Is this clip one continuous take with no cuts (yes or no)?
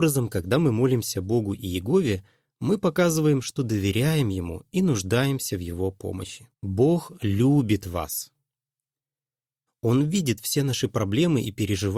no